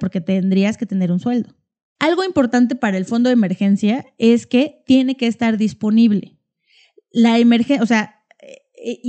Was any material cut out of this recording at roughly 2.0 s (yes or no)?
yes